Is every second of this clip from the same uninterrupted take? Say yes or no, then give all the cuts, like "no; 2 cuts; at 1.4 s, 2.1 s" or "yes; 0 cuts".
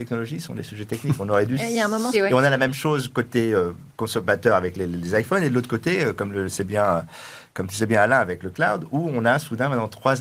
no; 1 cut; at 2.1 s